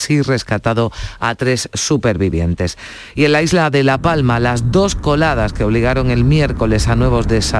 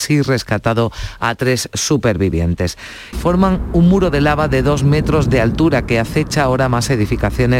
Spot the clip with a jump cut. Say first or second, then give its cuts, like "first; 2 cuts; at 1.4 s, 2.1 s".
second; 1 cut; at 3.1 s